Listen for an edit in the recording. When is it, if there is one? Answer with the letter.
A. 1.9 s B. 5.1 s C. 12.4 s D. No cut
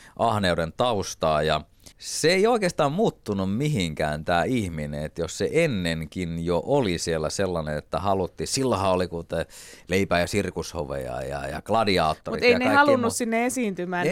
A